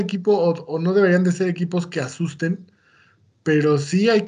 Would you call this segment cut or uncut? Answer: uncut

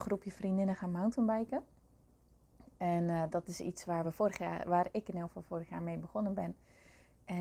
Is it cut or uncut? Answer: uncut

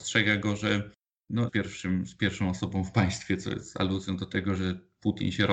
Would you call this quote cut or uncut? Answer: cut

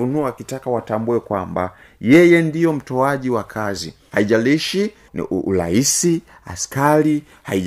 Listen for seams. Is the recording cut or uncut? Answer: uncut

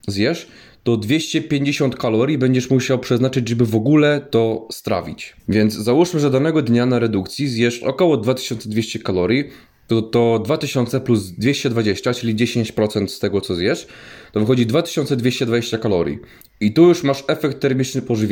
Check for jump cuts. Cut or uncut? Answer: cut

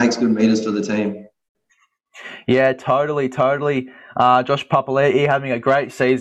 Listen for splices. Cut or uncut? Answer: uncut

